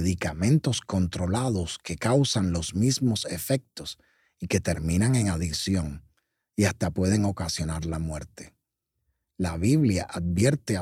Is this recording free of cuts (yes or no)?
yes